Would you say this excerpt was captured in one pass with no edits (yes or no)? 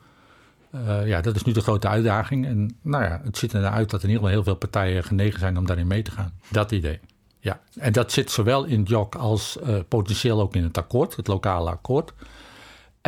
no